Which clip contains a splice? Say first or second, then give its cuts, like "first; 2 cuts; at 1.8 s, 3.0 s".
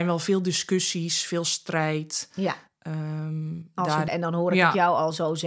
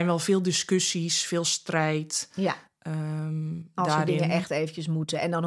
first; 1 cut; at 4.1 s